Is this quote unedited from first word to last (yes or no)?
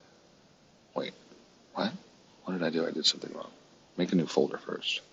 yes